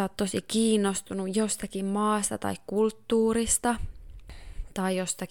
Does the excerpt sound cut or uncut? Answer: uncut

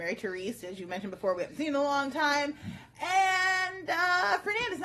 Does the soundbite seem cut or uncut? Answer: uncut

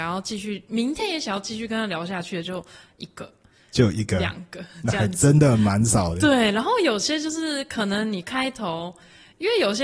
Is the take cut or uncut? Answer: uncut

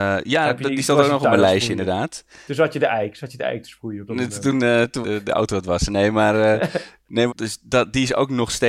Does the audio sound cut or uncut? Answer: cut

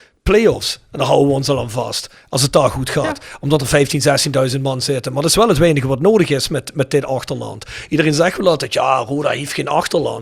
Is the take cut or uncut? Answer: uncut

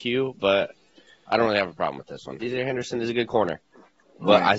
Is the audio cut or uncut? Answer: cut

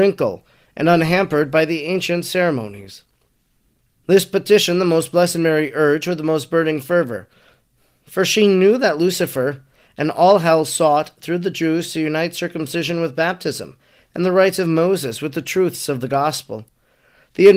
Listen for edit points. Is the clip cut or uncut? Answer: cut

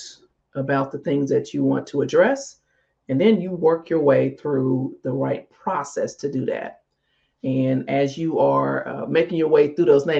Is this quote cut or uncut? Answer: uncut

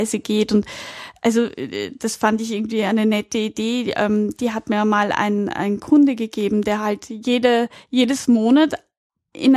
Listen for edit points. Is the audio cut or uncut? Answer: uncut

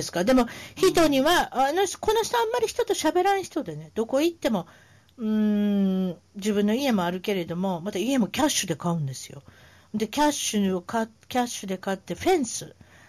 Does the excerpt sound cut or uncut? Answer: uncut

